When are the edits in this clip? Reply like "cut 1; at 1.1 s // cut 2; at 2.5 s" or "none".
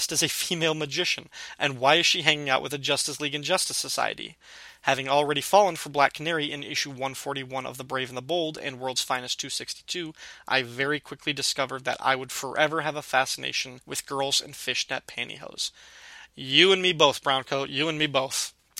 none